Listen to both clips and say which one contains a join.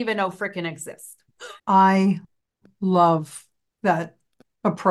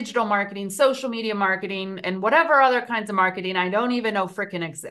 first; 1 cut; at 1.6 s

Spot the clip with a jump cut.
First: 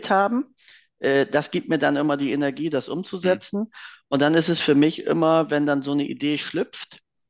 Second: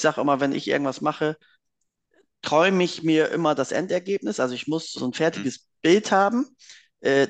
second; 1 cut; at 4.9 s

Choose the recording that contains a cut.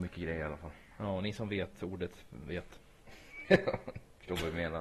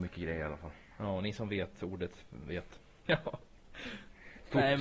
second; 1 cut; at 3.1 s

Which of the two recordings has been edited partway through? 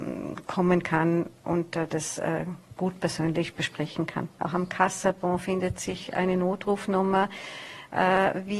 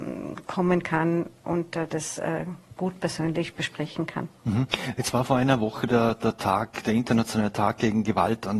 first; 1 cut; at 4.4 s

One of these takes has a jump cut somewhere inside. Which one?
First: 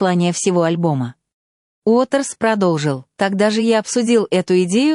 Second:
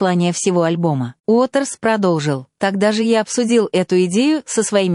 second; 1 cut; at 1.2 s

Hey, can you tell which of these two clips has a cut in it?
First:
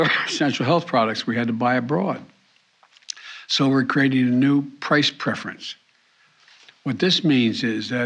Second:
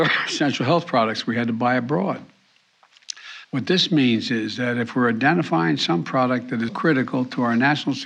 second; 2 cuts; at 3.4 s, 6.7 s

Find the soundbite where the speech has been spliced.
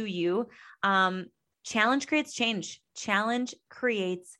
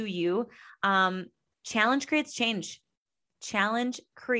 first; 1 cut; at 2.9 s

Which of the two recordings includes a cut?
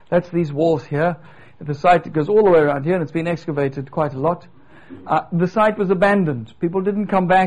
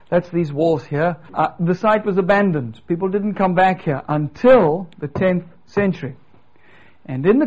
second; 1 cut; at 1.3 s

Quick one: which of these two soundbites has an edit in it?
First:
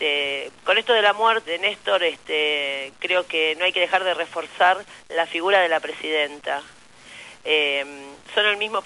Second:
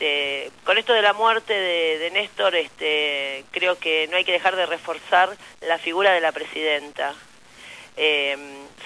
first; 1 cut; at 1.5 s

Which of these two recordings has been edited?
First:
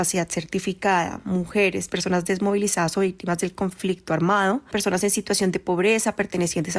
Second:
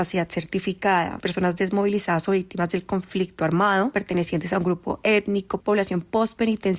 second; 3 cuts; at 1.2 s, 3.9 s, 5.6 s

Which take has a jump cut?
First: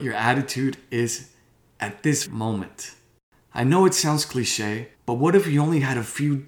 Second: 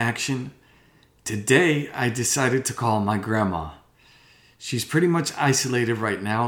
first; 2 cuts; at 2.2 s, 4.9 s

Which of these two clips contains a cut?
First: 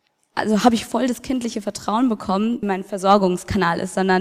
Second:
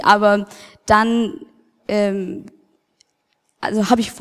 first; 1 cut; at 2.6 s

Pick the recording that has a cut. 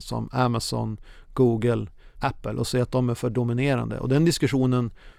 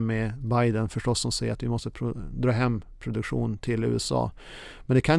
first; 1 cut; at 2.1 s

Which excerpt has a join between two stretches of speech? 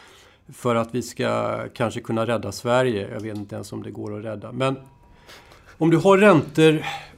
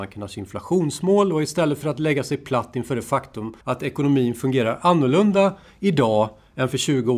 second; 1 cut; at 3.6 s

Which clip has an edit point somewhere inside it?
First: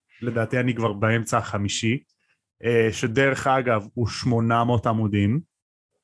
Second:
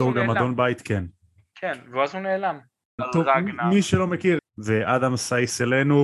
second; 2 cuts; at 3.0 s, 4.4 s

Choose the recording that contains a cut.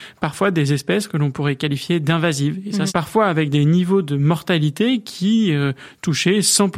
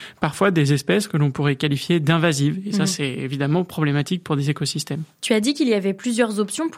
first; 1 cut; at 2.9 s

